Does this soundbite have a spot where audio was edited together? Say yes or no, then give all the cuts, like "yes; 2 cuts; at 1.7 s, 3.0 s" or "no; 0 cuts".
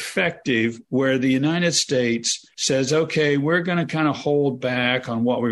no; 0 cuts